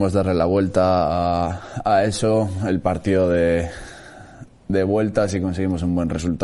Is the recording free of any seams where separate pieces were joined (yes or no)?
yes